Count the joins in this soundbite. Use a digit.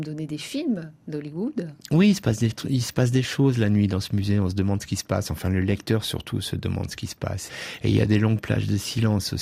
0